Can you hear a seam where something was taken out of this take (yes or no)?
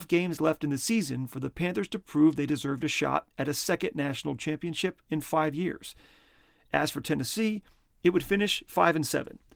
no